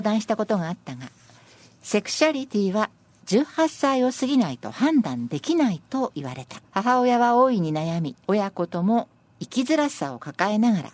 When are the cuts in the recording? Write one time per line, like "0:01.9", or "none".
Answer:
0:06.6
0:08.2